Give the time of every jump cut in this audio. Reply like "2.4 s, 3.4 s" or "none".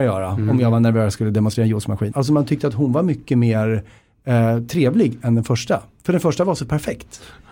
2.1 s